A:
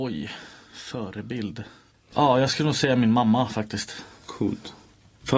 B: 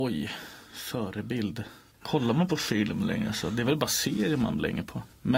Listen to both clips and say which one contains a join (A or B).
B